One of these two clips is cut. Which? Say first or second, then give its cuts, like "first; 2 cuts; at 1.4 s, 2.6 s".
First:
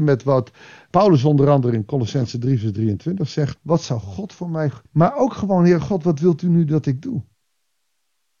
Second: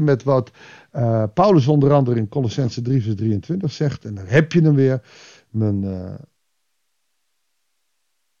first; 3 cuts; at 0.9 s, 3.6 s, 4.9 s